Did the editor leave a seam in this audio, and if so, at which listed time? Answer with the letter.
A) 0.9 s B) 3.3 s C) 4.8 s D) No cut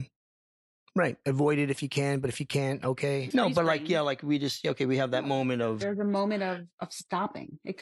B